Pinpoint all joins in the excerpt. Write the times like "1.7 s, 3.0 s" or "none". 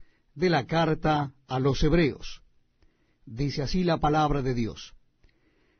none